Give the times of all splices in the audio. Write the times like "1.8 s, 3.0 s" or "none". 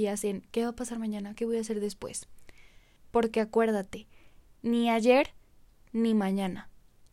1.3 s, 3.0 s